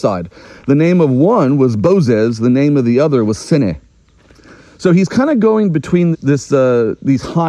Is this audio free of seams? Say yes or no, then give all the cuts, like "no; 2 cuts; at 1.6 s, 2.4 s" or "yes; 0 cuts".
no; 1 cut; at 6.1 s